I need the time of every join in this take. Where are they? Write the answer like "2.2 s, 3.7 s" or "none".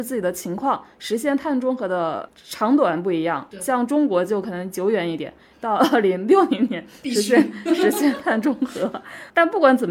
3.5 s